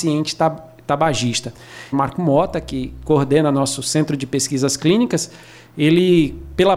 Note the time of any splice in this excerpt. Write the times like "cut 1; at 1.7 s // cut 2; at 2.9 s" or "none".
cut 1; at 1.9 s